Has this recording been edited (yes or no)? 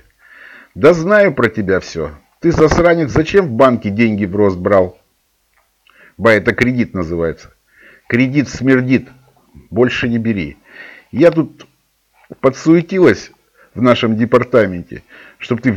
no